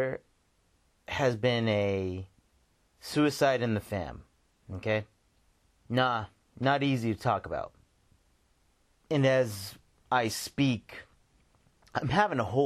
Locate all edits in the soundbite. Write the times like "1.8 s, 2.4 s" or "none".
none